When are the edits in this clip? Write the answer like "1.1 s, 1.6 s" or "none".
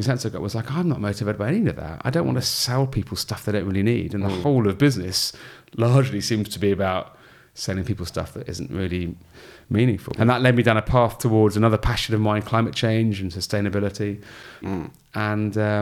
10.1 s, 14.6 s